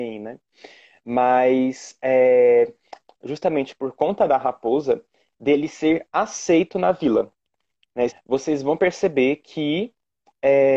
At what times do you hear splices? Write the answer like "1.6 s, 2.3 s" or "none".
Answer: 3.0 s, 8.1 s